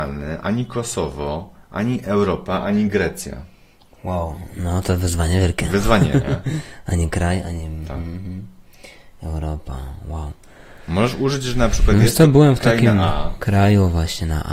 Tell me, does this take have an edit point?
no; 0 cuts

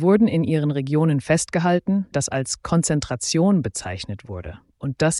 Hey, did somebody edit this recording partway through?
yes; 1 cut; at 2.1 s

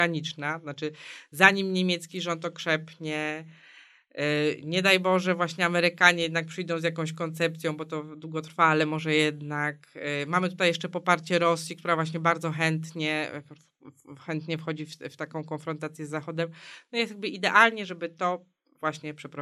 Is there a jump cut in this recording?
no; 0 cuts

